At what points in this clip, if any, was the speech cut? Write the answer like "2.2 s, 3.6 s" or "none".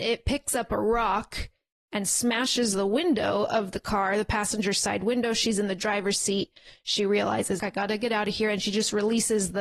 7.6 s